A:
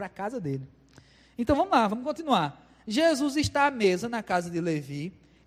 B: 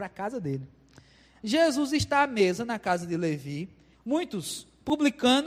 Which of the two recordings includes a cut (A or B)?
B